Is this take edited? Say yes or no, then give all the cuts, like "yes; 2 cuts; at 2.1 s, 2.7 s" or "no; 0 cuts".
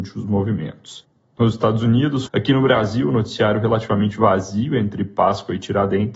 yes; 1 cut; at 2.3 s